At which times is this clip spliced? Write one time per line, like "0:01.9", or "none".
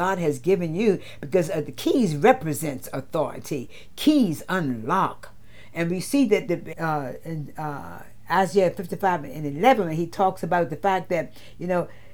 0:06.7